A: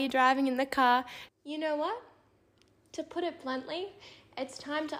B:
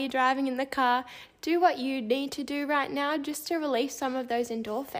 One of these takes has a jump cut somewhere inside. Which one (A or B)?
A